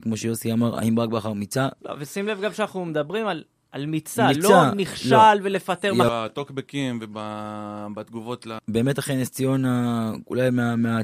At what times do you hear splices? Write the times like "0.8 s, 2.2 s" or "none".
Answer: 1.8 s, 6.1 s, 8.6 s